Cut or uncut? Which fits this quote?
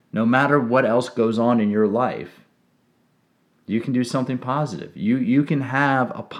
uncut